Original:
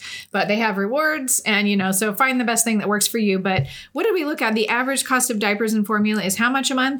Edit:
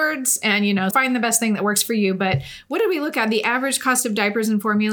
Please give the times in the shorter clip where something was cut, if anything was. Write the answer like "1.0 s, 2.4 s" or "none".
0.9 s